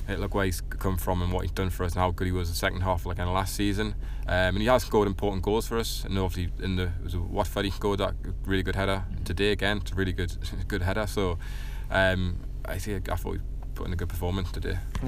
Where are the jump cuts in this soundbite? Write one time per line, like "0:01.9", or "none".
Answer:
none